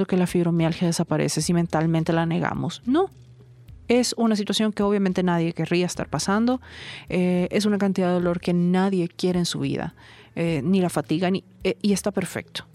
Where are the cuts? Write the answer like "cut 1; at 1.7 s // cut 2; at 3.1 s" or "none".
none